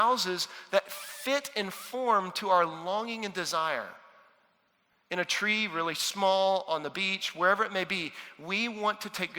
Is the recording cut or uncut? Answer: uncut